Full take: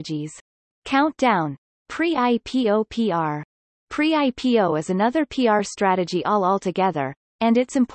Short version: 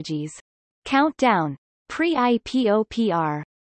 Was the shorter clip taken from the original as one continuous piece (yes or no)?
yes